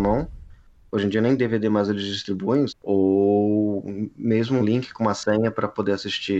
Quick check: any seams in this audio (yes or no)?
yes